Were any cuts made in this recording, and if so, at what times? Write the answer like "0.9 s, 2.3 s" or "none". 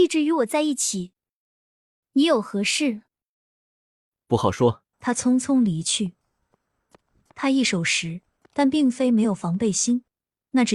2.0 s, 4.9 s

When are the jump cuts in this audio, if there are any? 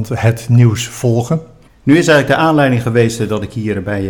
1.7 s

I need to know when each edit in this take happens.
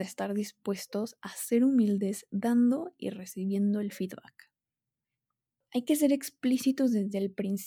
none

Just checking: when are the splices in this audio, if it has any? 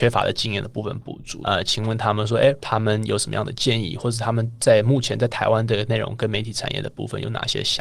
1.4 s, 2.6 s

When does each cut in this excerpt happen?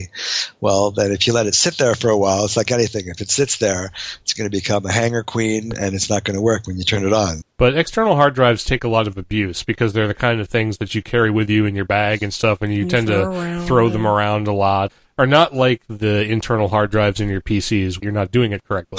7.4 s, 18.0 s

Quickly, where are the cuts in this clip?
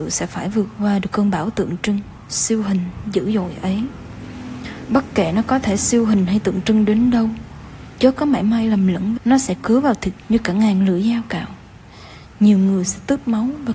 9.2 s

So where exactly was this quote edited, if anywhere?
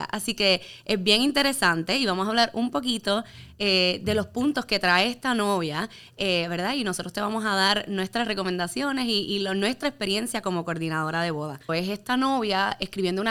11.7 s

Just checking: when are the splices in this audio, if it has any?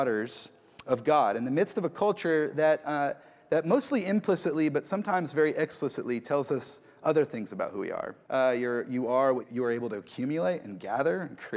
8.2 s, 9.4 s

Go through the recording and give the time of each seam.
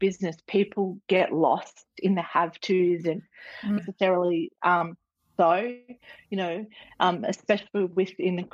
3.8 s

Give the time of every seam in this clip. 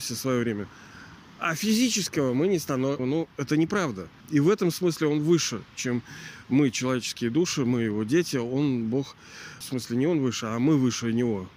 3.0 s, 4.2 s, 9.6 s

